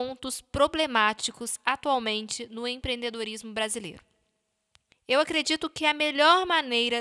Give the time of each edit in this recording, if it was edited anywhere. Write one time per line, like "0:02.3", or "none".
0:04.9